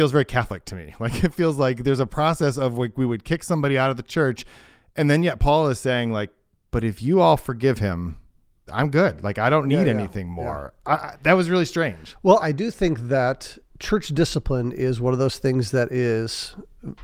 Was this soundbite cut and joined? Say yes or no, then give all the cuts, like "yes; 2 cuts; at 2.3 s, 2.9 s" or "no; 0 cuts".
yes; 1 cut; at 12.4 s